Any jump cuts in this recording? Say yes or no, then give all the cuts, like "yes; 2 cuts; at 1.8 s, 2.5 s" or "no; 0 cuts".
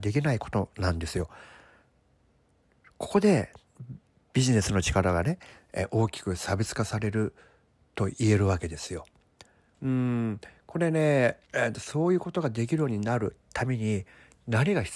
yes; 2 cuts; at 9.7 s, 11.4 s